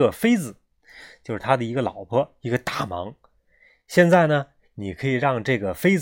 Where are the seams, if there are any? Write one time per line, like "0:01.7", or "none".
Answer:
none